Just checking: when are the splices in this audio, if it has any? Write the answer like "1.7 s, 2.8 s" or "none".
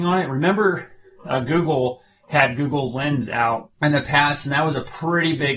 3.7 s

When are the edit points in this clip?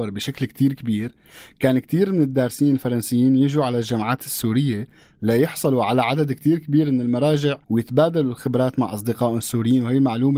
7.6 s

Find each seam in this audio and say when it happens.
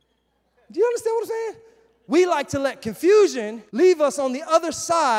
3.7 s

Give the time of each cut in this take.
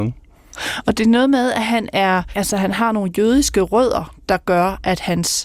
none

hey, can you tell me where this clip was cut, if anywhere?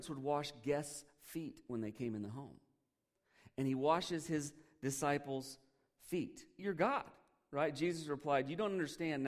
6.6 s

